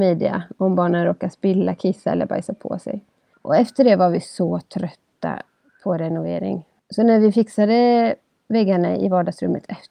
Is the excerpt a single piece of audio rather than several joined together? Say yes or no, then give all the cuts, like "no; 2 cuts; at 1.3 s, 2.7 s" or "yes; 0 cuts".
no; 2 cuts; at 3.3 s, 6.8 s